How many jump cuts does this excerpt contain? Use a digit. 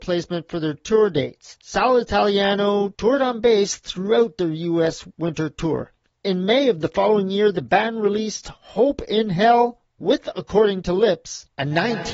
0